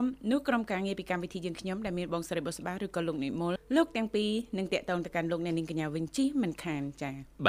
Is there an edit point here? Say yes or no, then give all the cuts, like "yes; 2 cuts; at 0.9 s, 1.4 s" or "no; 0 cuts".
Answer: yes; 1 cut; at 3.6 s